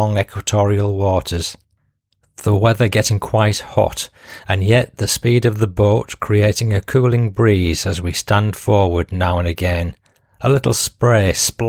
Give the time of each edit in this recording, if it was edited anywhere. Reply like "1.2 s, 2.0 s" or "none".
none